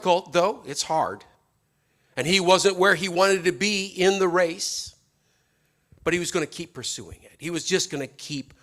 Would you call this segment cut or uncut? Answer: uncut